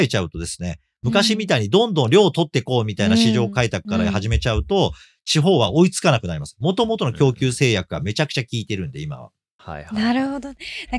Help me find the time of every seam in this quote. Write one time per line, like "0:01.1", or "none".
none